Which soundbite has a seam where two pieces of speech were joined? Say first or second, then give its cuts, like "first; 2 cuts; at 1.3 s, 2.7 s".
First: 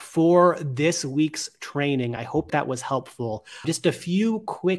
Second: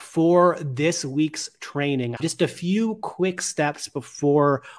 second; 1 cut; at 2.2 s